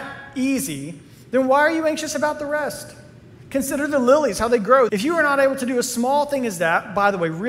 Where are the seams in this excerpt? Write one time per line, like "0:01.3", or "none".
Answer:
0:04.9